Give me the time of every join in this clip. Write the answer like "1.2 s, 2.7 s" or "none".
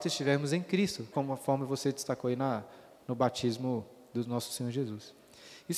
1.1 s